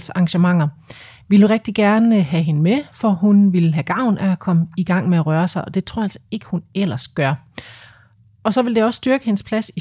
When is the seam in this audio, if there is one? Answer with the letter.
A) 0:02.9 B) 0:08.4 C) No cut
C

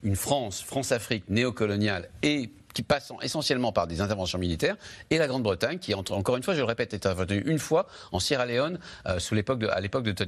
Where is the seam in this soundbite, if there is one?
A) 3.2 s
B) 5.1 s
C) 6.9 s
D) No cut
D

